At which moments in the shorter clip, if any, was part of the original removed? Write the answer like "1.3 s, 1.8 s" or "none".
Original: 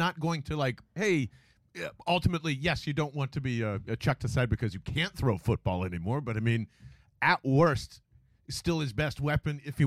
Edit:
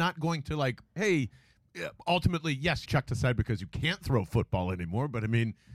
2.9 s